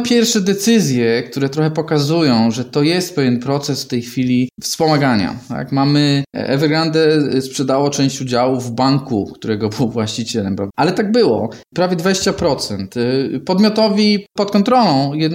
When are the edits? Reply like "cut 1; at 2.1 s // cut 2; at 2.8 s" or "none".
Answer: cut 1; at 10.7 s

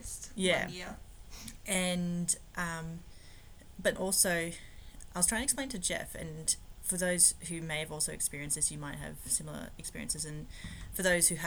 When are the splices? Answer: cut 1; at 4.0 s

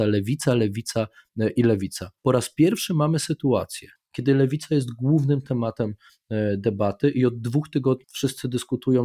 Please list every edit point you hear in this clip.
cut 1; at 2.2 s // cut 2; at 4.0 s // cut 3; at 8.0 s

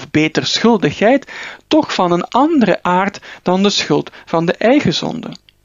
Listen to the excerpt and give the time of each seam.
none

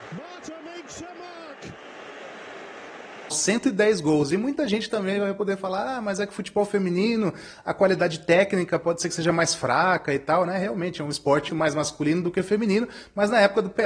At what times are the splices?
cut 1; at 3.3 s // cut 2; at 11.5 s

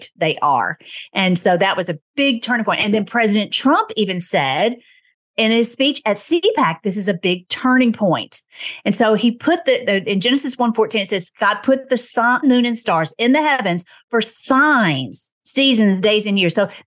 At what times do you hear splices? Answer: cut 1; at 12.4 s // cut 2; at 15.4 s

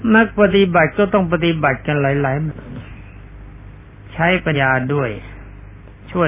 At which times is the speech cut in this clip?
cut 1; at 2.5 s // cut 2; at 4.5 s

